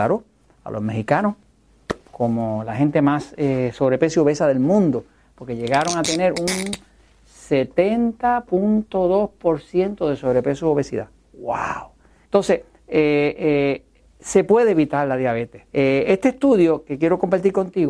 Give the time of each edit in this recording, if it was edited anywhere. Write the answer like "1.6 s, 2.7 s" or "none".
12.2 s, 15.7 s